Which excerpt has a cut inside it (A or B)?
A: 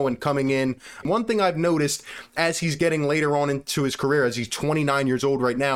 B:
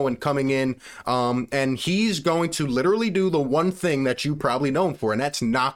A